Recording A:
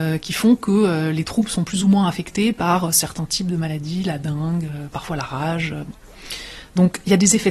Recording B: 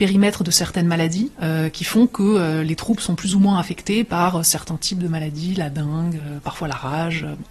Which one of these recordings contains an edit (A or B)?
B